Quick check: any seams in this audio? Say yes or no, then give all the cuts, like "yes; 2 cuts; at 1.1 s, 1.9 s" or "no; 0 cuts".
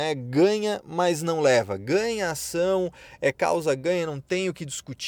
no; 0 cuts